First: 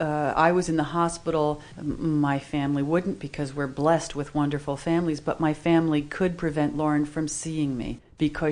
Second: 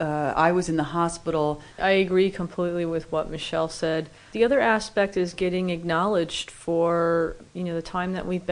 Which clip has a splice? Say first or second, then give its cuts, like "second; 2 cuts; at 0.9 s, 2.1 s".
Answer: second; 1 cut; at 1.7 s